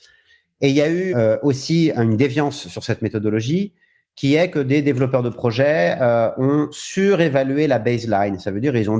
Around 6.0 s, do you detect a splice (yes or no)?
no